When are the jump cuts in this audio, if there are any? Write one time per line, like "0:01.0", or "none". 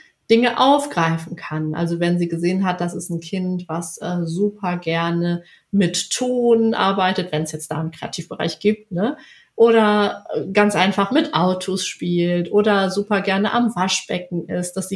none